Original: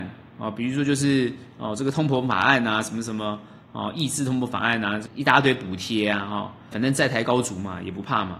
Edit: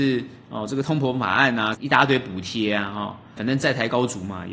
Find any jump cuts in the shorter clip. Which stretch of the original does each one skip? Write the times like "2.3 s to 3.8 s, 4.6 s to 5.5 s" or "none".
2.8 s to 5.1 s

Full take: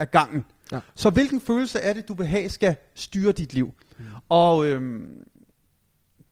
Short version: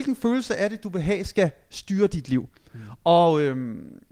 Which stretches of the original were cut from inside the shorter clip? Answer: none

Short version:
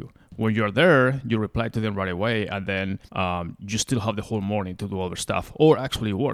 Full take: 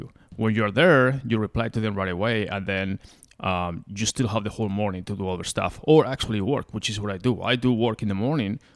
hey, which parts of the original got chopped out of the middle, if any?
3.1 s to 3.3 s

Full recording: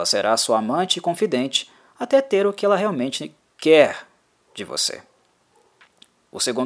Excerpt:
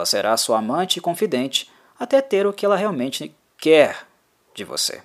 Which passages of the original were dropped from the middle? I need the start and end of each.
none

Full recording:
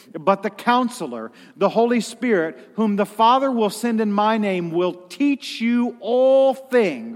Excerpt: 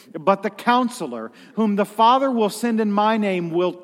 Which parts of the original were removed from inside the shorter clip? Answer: 1.5 s to 2.7 s

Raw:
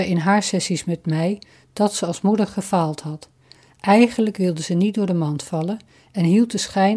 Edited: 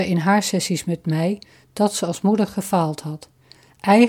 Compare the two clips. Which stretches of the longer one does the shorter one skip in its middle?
none

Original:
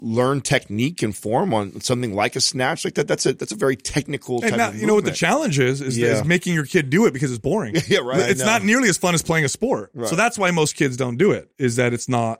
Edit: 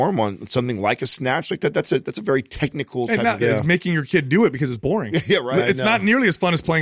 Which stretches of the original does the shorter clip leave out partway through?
4.7 s to 6.0 s

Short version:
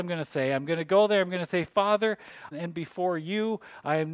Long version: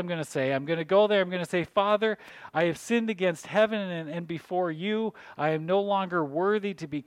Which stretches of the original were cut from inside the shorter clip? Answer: 2.5 s to 4.0 s

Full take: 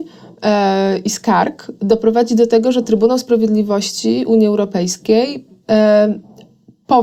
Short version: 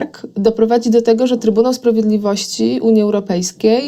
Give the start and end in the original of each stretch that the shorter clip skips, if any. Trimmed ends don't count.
none

